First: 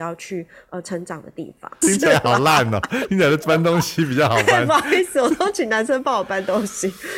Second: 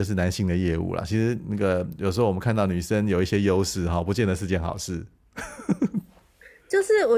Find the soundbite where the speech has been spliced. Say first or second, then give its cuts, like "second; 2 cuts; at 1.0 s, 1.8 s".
first; 1 cut; at 1.8 s